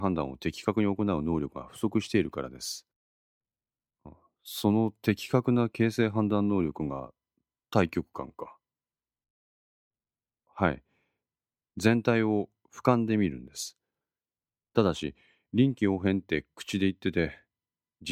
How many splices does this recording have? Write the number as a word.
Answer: one